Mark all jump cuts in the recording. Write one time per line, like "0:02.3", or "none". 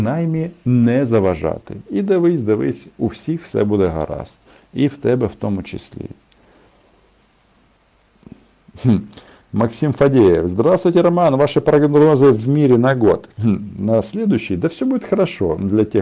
none